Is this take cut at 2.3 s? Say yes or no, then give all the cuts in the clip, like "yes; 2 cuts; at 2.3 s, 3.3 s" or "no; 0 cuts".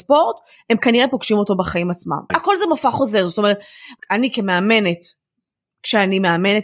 yes; 2 cuts; at 2.3 s, 4.0 s